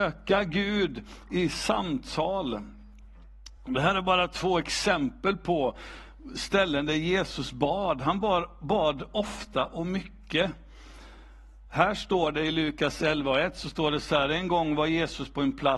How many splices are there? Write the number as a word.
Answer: zero